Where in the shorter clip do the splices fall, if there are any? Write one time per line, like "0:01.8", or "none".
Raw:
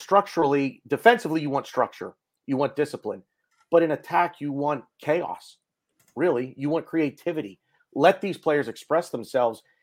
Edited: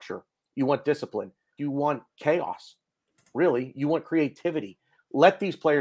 0:01.6